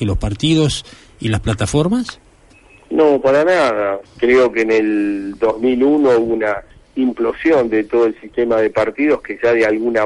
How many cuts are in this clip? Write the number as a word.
one